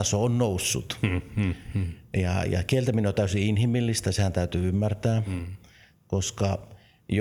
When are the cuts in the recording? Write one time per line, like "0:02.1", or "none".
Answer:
none